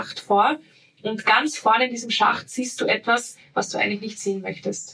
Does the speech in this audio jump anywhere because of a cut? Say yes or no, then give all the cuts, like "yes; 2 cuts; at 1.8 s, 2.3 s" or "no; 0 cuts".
no; 0 cuts